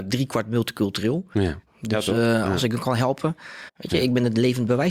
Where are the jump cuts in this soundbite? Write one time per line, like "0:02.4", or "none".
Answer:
0:01.7
0:03.7

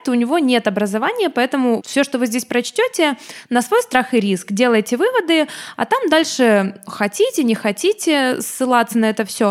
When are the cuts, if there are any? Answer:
0:01.8

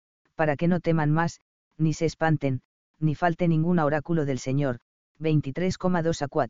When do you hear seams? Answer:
none

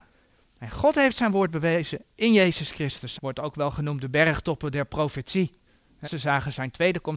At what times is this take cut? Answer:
0:03.2
0:06.0

